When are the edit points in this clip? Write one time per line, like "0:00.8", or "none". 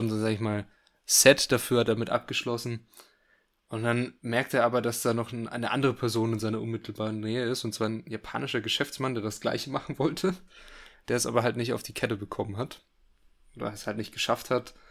none